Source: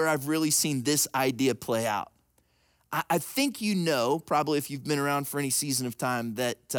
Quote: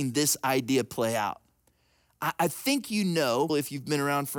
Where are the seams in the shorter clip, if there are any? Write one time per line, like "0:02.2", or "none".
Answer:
0:03.5